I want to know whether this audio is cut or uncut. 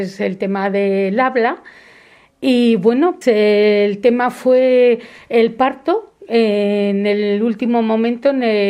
cut